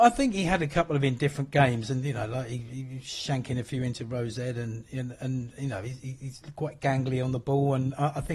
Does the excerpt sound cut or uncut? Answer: uncut